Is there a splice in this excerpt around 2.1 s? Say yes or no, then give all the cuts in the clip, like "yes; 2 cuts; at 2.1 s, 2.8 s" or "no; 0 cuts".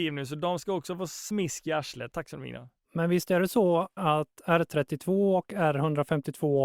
yes; 2 cuts; at 2.1 s, 4.0 s